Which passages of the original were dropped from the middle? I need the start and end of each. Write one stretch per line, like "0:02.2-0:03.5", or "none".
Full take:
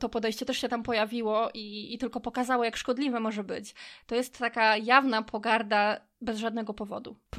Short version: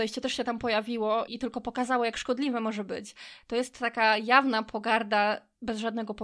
0:01.5-0:01.9